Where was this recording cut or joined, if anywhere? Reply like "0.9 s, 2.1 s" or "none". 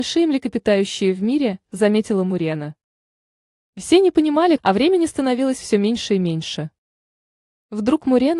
4.6 s